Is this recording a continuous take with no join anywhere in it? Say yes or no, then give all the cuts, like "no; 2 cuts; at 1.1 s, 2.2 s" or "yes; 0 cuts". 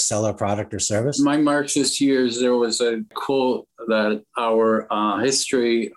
yes; 0 cuts